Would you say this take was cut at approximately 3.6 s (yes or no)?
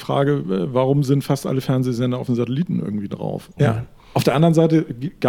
yes